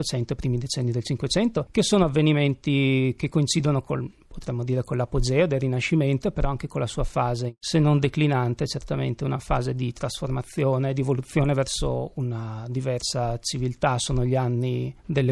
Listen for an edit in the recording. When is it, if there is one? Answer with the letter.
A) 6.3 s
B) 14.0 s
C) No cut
C